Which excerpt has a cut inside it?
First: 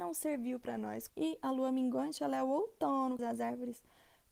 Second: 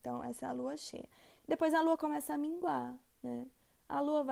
first; 2 cuts; at 1.1 s, 3.2 s

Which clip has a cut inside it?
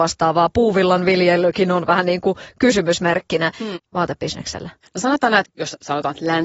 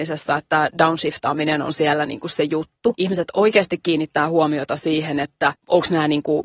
first; 2 cuts; at 3.7 s, 5.4 s

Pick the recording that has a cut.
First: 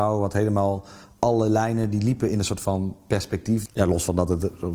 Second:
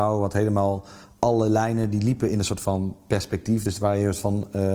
first; 1 cut; at 3.7 s

